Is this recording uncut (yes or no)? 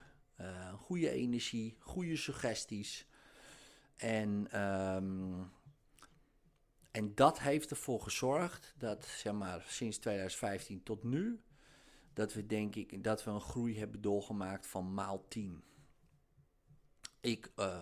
yes